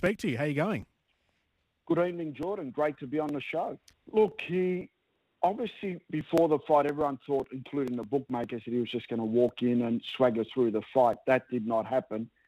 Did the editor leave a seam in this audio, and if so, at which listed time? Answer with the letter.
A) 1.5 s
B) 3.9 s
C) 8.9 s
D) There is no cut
B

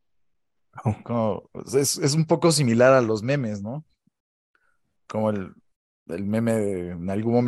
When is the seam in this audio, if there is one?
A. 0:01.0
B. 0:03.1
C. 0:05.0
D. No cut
A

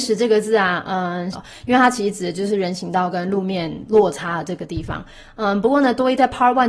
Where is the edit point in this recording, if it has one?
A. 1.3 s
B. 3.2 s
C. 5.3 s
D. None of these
A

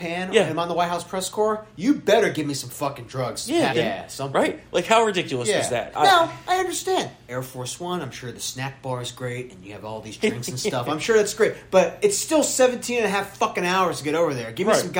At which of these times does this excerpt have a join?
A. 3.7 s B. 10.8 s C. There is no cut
A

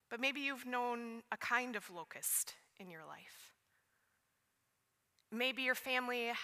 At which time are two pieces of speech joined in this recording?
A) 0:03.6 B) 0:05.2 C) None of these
C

